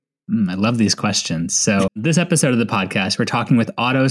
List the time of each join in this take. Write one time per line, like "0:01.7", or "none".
0:01.9